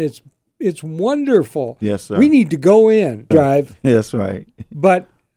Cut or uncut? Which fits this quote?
cut